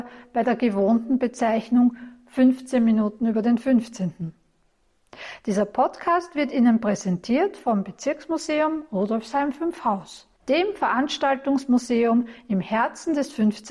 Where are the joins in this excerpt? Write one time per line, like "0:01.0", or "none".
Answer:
0:10.4